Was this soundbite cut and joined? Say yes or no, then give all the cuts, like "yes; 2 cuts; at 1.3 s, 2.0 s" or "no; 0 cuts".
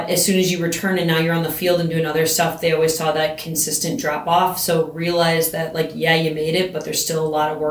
no; 0 cuts